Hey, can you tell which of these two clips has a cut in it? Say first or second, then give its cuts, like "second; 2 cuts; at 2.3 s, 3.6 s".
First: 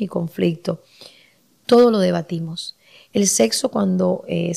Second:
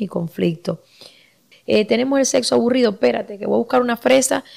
second; 1 cut; at 1.5 s